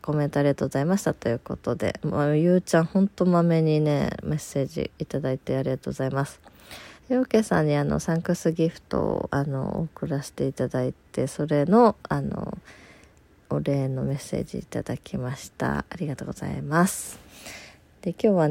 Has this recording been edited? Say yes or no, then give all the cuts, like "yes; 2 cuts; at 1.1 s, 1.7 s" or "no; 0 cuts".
yes; 1 cut; at 7.0 s